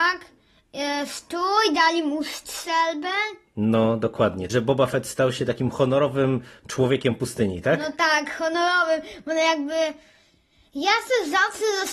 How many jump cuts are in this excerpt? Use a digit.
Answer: 1